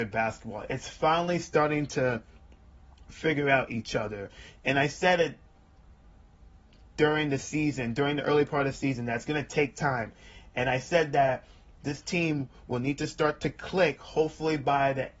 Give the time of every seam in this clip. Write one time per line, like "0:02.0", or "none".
none